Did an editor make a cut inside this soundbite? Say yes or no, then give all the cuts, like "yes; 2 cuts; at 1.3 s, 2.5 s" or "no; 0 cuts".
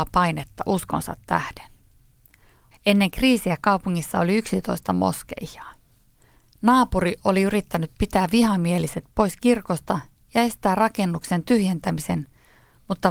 yes; 2 cuts; at 2.7 s, 6.5 s